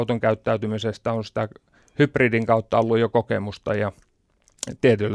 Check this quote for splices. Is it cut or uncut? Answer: uncut